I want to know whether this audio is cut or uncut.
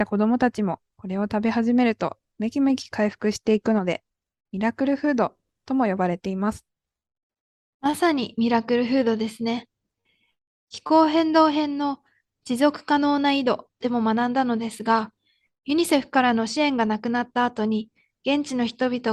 uncut